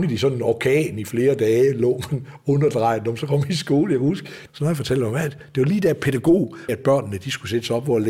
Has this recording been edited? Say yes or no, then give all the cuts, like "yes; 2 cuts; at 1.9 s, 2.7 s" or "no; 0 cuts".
yes; 2 cuts; at 4.5 s, 6.7 s